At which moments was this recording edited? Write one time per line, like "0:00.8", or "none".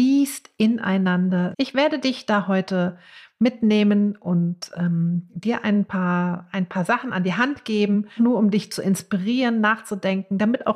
0:01.5
0:08.2